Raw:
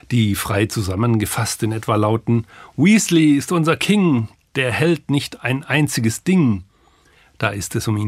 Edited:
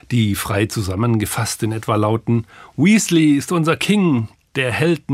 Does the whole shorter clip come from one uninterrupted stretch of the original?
yes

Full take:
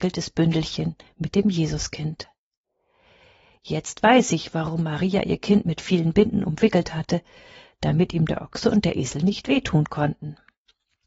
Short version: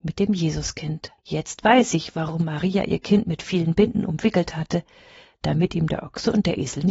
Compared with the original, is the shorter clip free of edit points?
no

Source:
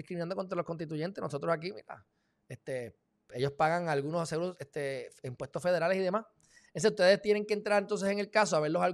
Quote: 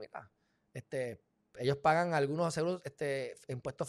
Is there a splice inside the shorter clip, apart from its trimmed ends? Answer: no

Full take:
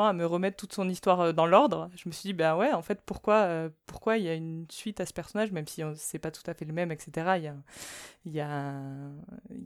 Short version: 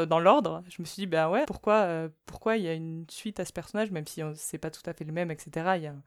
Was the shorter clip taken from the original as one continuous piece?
no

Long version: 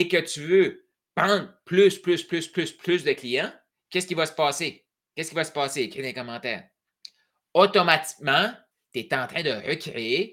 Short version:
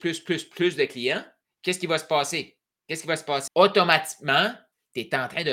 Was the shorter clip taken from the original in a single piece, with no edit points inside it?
no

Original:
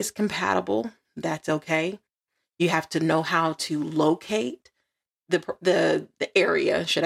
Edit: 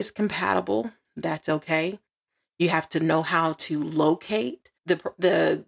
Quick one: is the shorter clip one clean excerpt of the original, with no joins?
no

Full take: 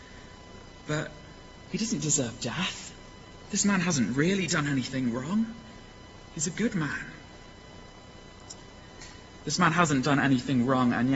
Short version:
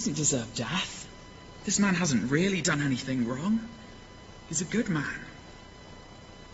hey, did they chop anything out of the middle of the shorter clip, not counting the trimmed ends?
no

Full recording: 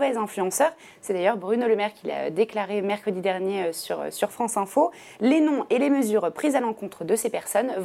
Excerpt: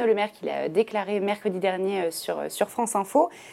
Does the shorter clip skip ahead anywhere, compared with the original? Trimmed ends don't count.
no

